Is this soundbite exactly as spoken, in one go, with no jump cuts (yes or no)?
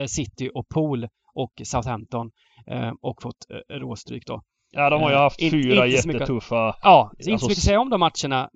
yes